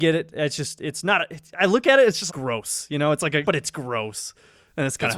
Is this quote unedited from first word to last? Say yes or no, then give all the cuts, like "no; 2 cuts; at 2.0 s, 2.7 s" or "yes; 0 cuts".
no; 2 cuts; at 2.3 s, 3.4 s